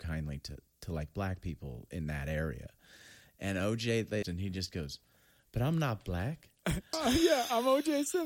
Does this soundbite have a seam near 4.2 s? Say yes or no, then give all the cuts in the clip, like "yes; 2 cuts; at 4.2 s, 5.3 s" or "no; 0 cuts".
yes; 2 cuts; at 4.2 s, 6.9 s